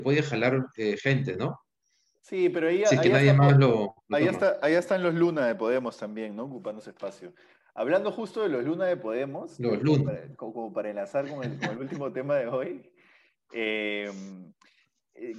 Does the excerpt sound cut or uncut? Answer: uncut